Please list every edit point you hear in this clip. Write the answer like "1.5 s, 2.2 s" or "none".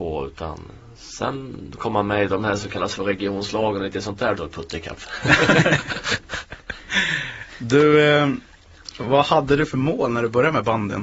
4.4 s